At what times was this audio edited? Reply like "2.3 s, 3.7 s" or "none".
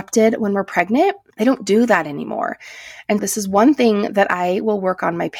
1.3 s, 3.2 s